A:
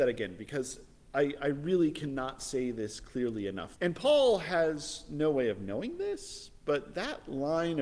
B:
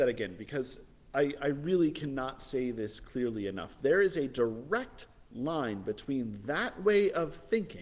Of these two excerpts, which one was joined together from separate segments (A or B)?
A